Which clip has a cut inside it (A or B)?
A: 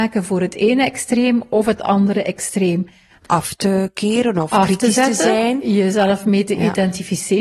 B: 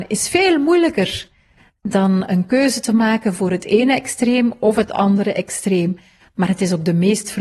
A